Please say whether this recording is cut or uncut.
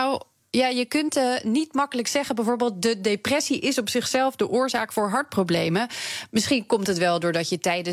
uncut